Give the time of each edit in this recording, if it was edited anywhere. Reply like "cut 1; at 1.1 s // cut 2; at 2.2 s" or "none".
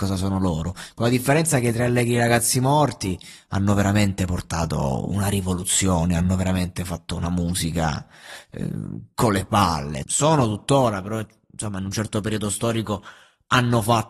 cut 1; at 10.0 s